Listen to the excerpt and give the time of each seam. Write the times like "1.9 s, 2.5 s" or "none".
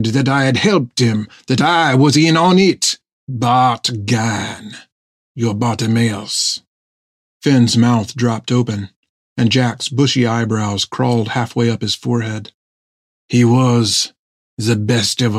3.1 s

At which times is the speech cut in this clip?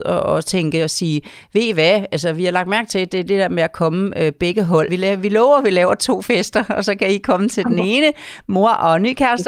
4.9 s

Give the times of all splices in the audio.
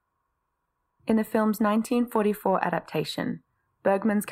0.9 s

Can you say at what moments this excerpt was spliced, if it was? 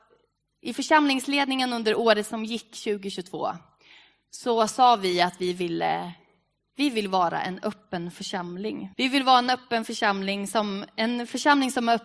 8.9 s

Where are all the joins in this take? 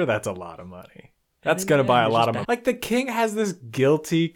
2.4 s

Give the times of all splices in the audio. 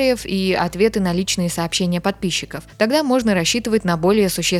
none

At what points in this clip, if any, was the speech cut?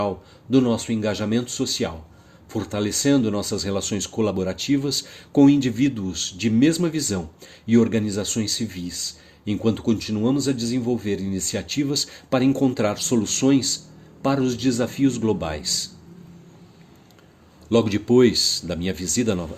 none

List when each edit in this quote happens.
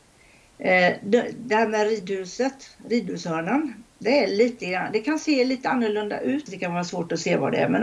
6.5 s

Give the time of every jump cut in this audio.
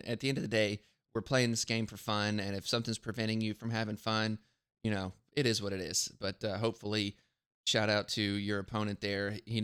none

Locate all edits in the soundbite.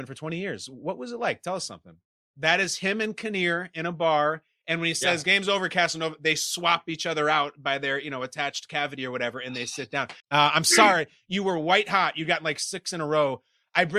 2.3 s, 10.2 s

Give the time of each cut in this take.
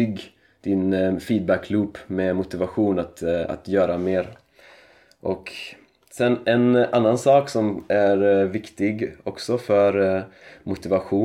none

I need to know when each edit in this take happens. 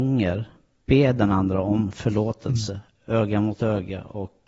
none

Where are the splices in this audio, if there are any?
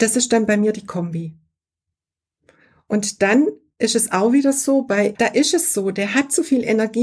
5.1 s

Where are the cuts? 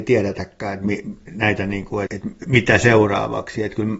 2.1 s

